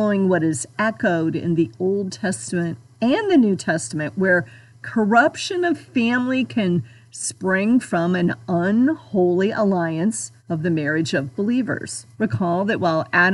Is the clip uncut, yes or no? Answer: no